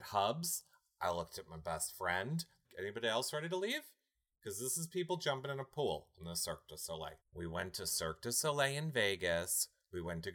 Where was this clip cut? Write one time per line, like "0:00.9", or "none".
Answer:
0:02.6
0:07.2